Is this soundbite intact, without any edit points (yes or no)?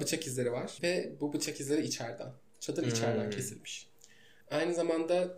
yes